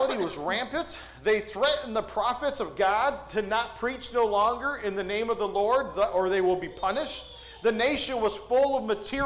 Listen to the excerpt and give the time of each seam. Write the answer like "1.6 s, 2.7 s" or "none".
none